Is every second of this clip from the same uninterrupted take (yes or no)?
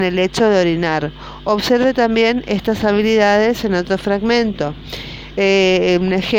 yes